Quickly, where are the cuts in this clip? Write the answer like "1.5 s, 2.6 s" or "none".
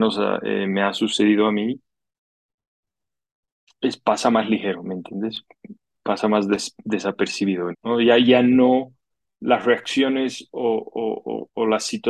7.7 s